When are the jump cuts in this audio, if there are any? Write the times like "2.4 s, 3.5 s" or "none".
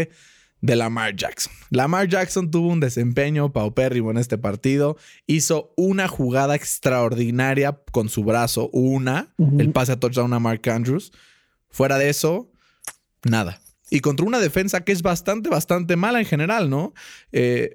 none

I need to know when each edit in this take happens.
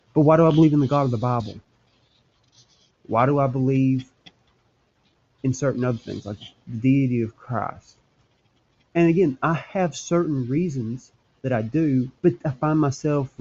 12.2 s

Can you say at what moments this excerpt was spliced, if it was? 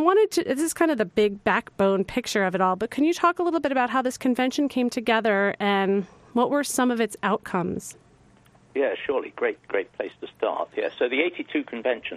none

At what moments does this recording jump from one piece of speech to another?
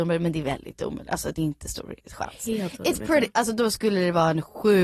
none

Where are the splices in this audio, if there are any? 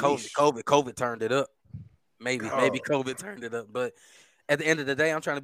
2.5 s

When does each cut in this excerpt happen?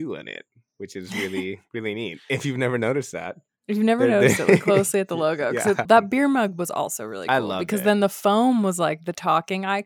5.8 s

